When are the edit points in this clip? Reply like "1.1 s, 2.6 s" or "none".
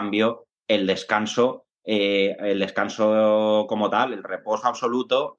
none